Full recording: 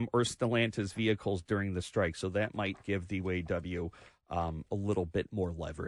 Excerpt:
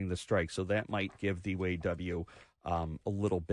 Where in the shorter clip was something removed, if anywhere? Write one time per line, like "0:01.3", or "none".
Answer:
none

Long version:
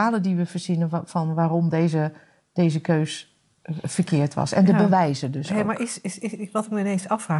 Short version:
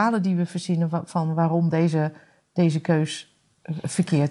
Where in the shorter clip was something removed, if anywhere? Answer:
none

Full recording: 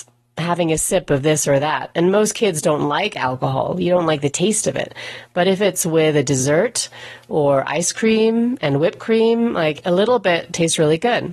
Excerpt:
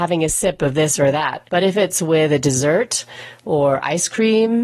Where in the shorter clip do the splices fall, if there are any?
0:01.4

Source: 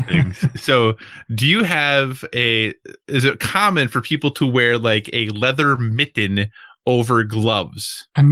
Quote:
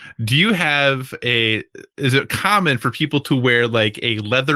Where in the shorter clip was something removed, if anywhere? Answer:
none

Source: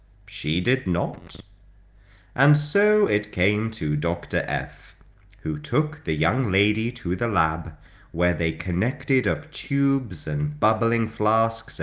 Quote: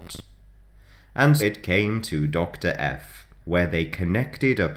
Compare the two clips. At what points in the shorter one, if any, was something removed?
0:01.4
0:03.4

